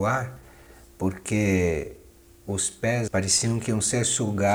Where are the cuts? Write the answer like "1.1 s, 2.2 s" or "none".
3.1 s